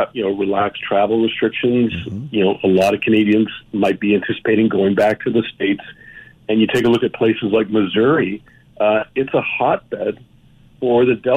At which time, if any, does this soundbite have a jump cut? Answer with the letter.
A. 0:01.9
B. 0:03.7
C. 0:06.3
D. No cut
B